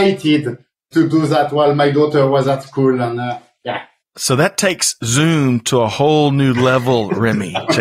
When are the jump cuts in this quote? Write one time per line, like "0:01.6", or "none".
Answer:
0:04.0